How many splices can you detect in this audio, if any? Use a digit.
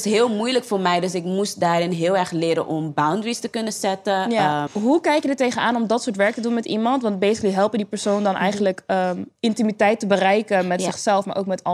1